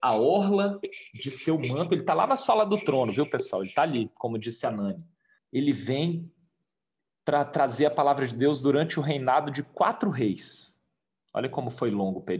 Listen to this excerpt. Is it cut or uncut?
cut